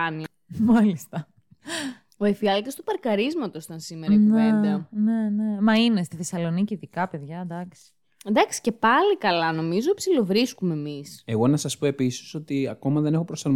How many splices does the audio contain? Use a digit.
0